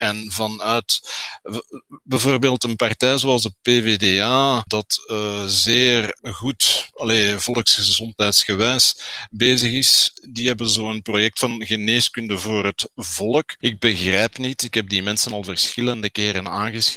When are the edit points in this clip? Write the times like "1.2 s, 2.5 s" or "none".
none